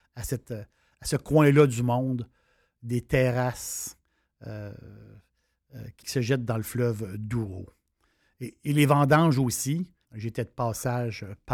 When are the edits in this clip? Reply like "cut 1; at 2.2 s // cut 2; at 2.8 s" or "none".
cut 1; at 6.0 s // cut 2; at 10.0 s